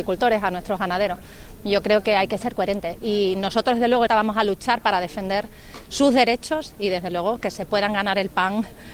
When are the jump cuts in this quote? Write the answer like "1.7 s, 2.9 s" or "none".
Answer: 4.1 s